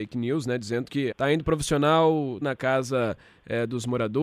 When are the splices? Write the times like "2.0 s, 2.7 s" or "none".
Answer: 1.1 s, 2.4 s